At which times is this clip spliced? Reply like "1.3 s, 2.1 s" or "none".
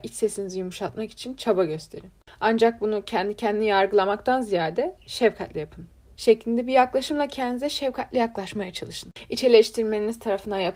6.2 s